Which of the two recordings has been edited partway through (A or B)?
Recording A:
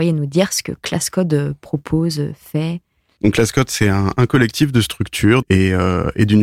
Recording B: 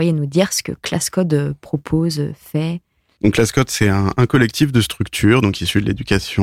A